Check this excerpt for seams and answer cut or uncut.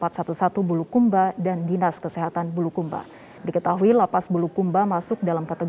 cut